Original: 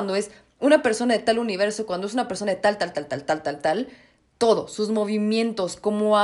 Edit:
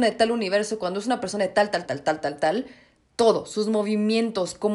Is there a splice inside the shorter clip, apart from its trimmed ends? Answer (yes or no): yes